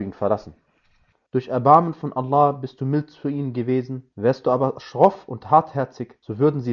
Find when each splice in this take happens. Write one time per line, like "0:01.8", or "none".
0:01.3
0:04.1